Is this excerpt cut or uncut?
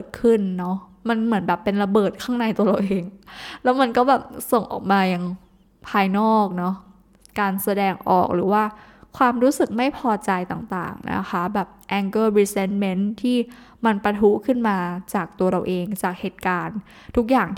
uncut